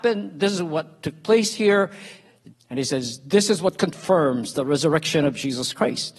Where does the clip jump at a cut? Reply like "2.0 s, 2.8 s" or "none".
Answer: 2.5 s

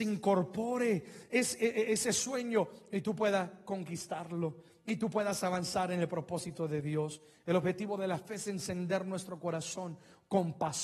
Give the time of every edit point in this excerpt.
none

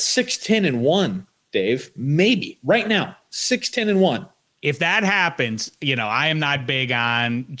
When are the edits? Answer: none

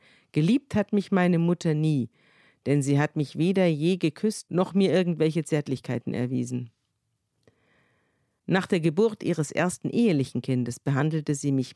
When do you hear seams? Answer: none

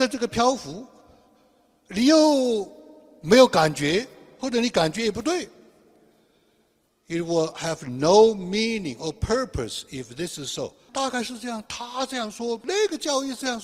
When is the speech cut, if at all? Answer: 10.9 s, 12.6 s

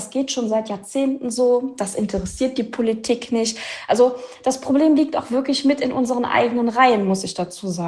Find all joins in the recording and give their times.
none

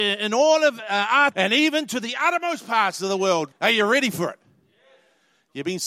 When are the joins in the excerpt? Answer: 1.3 s, 3.5 s

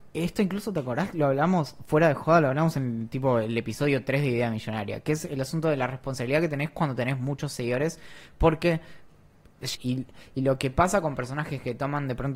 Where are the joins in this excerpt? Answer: 9.7 s

